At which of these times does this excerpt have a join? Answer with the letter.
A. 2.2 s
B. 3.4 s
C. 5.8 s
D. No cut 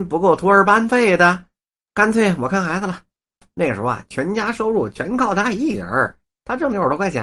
D